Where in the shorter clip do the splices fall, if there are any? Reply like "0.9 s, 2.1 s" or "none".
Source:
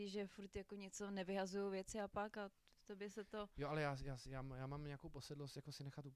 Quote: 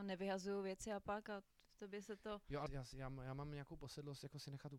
2.7 s